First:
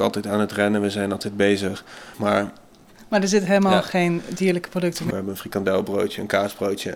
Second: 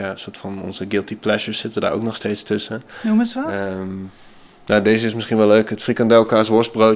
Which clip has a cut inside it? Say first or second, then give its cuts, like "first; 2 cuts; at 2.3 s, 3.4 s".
first; 2 cuts; at 2.1 s, 5.1 s